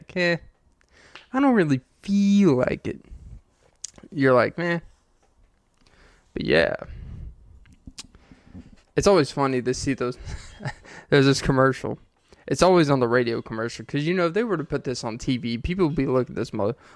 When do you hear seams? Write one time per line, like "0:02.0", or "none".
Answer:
0:08.8